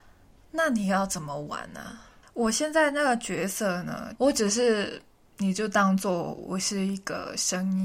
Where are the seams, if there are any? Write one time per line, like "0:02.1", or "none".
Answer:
0:04.2

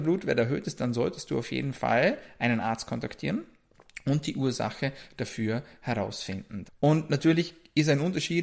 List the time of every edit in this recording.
0:06.6

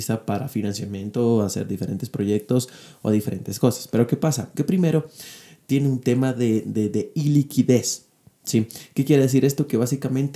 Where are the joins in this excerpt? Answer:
0:04.5

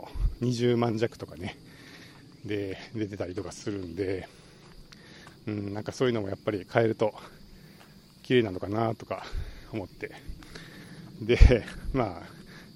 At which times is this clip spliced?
none

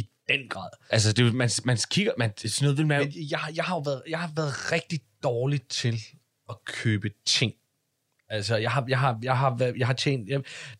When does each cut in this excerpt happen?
0:00.9

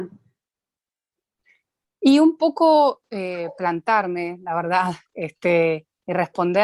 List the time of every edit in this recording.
none

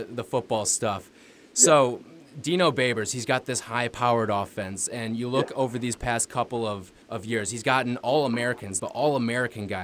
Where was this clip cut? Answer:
0:07.0
0:08.8

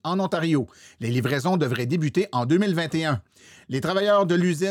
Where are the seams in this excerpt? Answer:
none

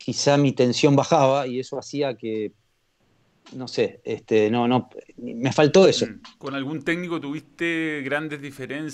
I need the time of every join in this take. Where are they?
0:06.4

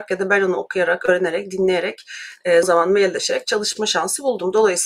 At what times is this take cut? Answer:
0:02.6

